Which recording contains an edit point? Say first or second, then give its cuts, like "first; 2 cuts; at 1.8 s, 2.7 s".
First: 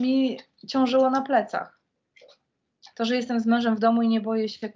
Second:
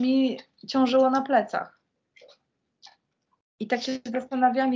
first; 1 cut; at 2.9 s